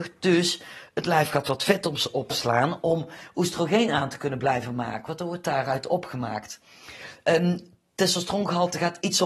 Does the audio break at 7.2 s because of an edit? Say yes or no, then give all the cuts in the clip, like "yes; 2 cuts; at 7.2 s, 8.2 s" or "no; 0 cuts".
no; 0 cuts